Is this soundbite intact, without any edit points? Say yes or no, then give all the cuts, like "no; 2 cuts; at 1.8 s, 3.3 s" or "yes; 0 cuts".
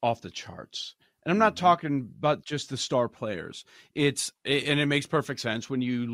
yes; 0 cuts